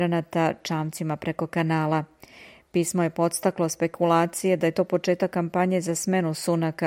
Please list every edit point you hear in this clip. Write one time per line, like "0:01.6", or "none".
none